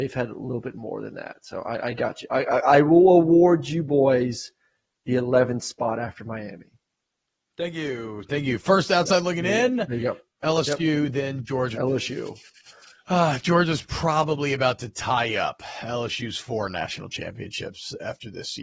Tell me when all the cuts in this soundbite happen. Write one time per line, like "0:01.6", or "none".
0:11.7